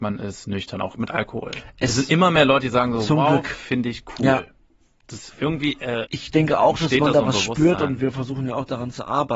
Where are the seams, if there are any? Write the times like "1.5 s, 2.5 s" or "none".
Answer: 6.1 s